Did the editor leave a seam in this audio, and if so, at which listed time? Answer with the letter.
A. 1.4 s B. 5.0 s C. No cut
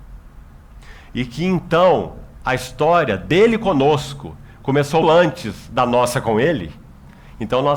B